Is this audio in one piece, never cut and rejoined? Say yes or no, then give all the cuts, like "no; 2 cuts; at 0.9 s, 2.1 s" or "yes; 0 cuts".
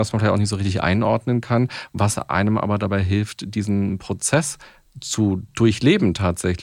yes; 0 cuts